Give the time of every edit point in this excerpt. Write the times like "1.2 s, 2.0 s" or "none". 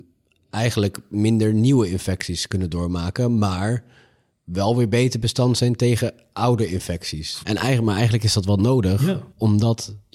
7.4 s